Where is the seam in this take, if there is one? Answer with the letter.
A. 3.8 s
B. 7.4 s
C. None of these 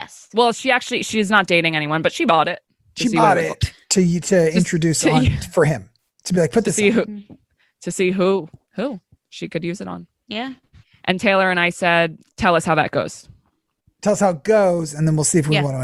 C